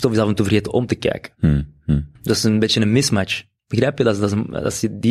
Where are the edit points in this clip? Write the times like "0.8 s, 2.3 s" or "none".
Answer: 2.2 s

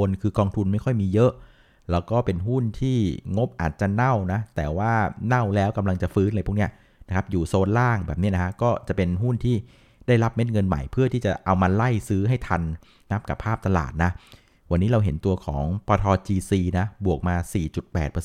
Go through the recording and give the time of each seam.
none

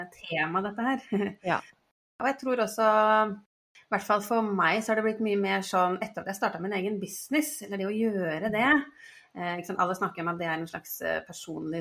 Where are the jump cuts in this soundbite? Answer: none

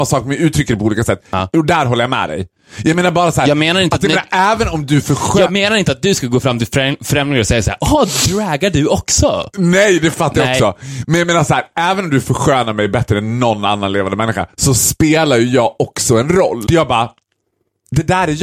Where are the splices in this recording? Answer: 16.7 s

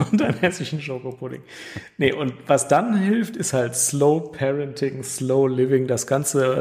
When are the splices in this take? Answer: none

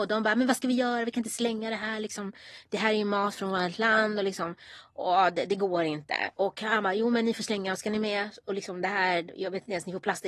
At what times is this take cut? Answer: none

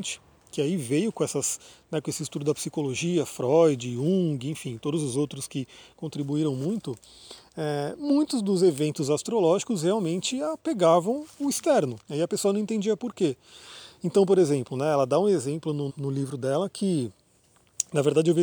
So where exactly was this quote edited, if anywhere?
12.0 s, 15.9 s

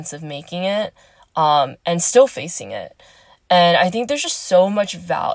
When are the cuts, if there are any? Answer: none

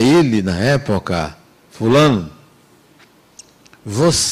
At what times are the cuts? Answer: none

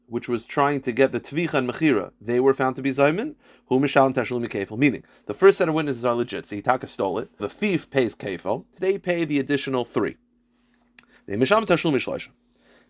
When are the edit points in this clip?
7.4 s, 8.8 s

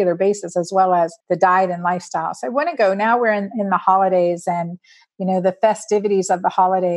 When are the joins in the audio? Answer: 1.2 s

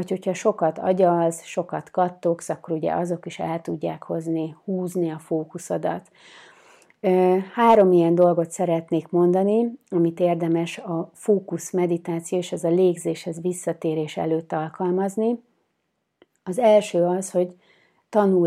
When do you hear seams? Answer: none

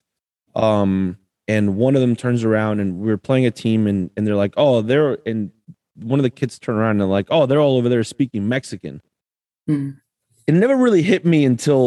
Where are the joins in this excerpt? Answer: none

